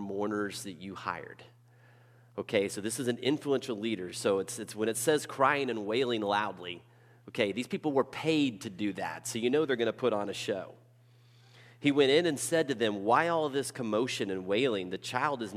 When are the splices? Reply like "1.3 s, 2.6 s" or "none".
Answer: none